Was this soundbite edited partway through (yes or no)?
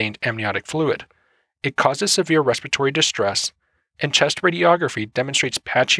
no